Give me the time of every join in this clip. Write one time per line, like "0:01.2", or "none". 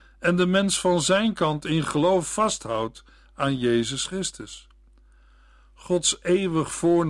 none